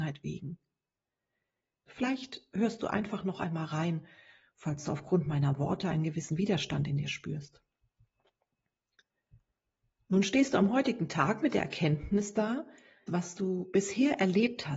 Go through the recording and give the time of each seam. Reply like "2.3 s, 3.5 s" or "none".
1.9 s, 13.1 s